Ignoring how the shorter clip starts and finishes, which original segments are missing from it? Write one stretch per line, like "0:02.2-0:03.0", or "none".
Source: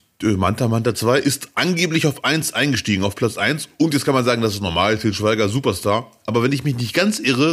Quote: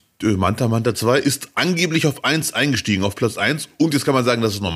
none